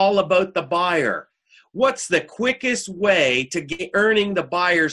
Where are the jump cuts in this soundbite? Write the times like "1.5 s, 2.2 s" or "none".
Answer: none

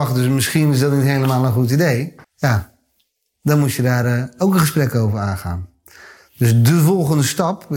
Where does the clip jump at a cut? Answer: 2.2 s

